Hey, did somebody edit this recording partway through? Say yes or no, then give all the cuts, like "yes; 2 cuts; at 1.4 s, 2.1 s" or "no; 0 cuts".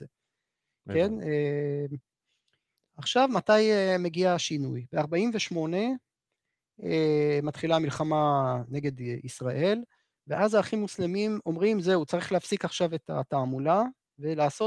no; 0 cuts